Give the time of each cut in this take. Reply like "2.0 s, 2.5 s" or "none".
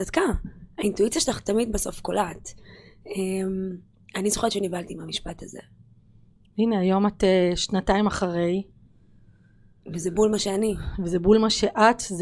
none